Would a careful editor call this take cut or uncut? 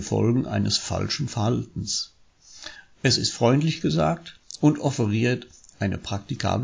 uncut